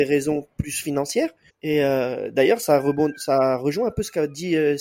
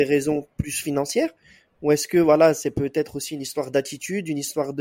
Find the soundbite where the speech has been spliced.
first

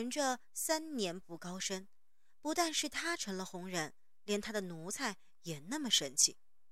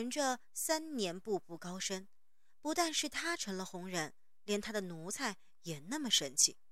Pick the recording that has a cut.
first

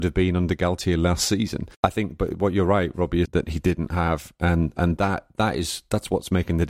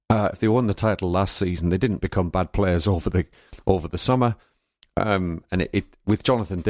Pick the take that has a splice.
first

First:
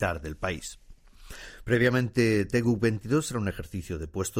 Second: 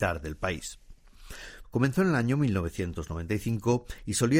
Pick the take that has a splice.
second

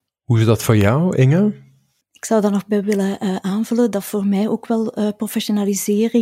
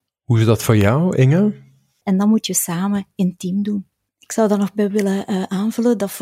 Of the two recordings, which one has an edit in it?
second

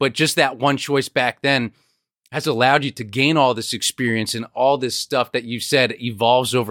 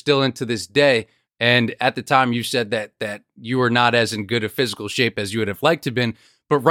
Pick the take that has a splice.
second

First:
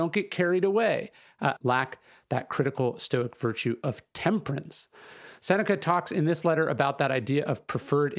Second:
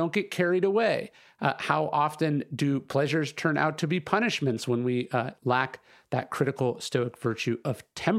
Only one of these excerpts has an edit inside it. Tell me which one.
first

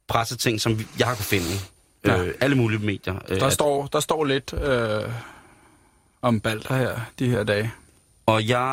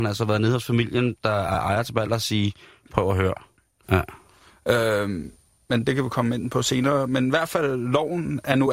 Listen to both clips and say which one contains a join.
second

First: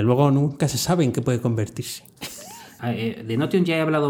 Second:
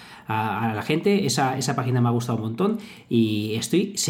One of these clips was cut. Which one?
first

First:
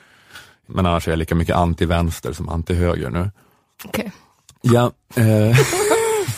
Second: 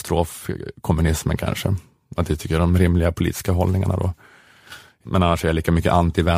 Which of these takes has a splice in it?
first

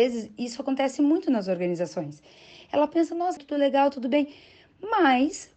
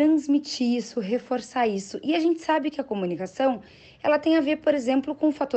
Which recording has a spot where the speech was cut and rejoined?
first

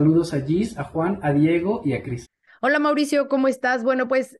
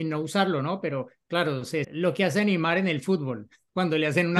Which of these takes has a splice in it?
second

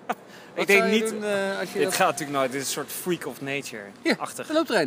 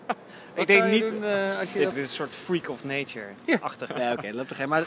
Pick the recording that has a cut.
second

